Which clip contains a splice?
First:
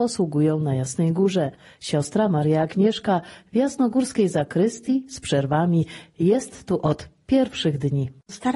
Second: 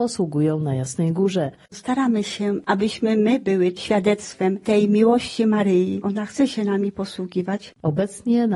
second; 2 cuts; at 1.7 s, 6.0 s

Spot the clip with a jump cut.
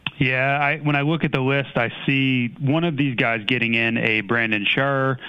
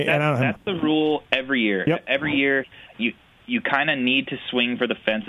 second; 1 cut; at 2.9 s

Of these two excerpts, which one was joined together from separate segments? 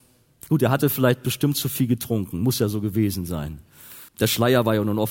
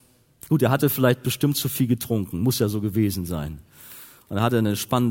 first; 1 cut; at 4.1 s

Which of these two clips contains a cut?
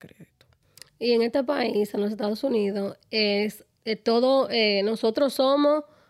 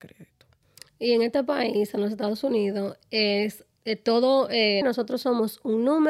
second; 1 cut; at 4.8 s

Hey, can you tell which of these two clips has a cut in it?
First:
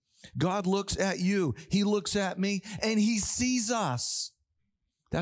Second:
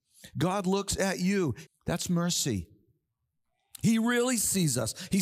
second; 1 cut; at 1.7 s

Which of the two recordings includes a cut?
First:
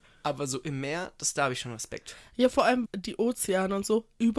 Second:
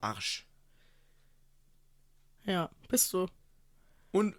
first; 1 cut; at 2.9 s

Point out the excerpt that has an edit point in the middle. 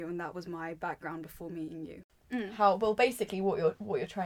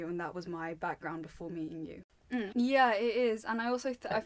second; 1 cut; at 2.5 s

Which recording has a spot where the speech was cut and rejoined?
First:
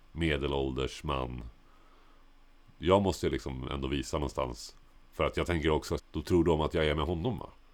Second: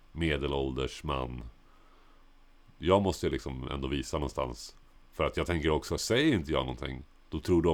first; 1 cut; at 6.0 s

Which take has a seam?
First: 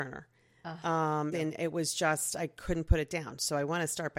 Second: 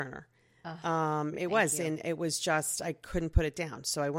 first; 1 cut; at 1.3 s

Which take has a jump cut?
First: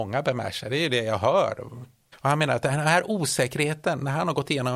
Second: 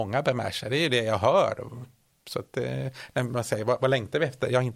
first; 1 cut; at 2.1 s

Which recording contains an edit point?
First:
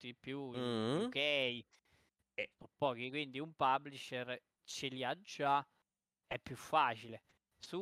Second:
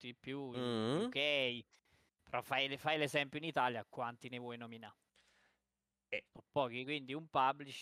first; 1 cut; at 2.2 s

